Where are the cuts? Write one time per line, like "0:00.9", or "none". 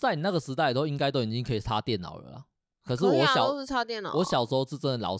none